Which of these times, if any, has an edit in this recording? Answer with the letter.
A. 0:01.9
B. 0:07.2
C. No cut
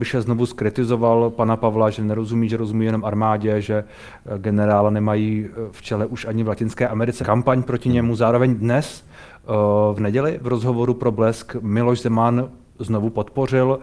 B